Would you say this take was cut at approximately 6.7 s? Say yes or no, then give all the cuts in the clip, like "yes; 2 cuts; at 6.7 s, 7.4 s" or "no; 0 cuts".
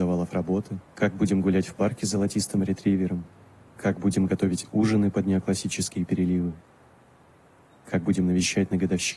no; 1 cut; at 0.9 s